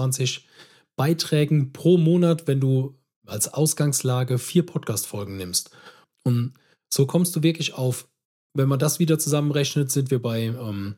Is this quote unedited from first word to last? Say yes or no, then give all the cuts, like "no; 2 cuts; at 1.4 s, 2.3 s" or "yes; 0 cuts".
no; 1 cut; at 6.0 s